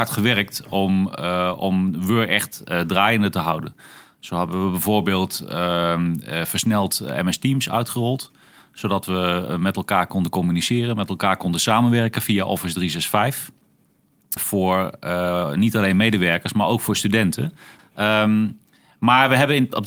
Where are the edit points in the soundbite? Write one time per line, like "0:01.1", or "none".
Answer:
0:14.4
0:17.8